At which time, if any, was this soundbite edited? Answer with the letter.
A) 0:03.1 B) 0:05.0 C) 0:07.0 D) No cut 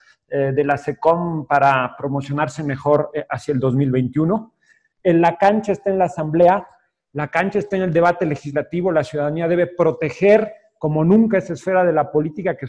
B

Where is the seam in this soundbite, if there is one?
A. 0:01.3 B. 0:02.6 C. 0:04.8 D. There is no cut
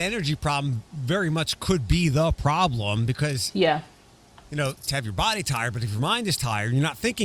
C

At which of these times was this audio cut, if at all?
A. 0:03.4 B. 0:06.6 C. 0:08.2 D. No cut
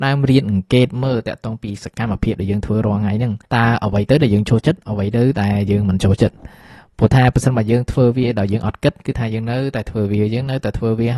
A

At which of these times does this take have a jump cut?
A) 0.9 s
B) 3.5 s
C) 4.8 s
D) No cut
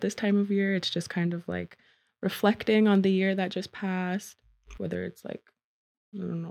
C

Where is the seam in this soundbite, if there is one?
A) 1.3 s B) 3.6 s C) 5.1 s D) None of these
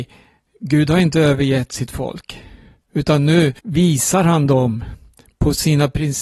B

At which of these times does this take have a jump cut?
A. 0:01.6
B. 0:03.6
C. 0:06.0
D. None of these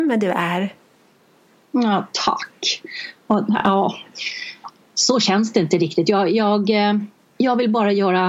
D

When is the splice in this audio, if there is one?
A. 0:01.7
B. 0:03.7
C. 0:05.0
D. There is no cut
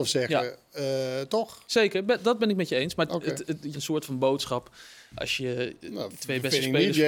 B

